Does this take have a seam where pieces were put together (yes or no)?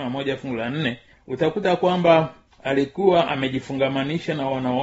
no